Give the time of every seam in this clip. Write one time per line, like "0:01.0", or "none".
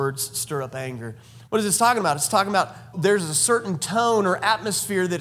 0:01.5
0:02.9